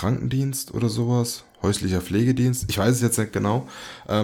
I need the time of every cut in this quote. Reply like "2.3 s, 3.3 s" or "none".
none